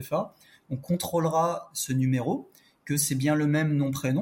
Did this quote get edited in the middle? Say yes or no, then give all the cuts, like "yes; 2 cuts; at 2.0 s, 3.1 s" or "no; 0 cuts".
no; 0 cuts